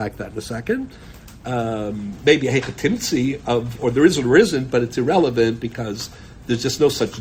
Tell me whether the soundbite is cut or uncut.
cut